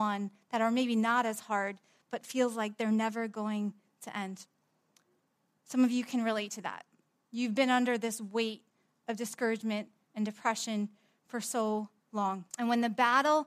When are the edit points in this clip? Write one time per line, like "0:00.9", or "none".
0:12.5